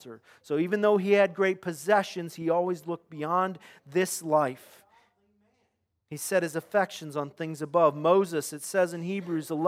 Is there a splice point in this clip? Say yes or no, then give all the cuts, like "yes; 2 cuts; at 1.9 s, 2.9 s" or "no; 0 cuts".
no; 0 cuts